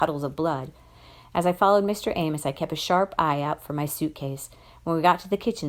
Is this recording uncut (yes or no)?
yes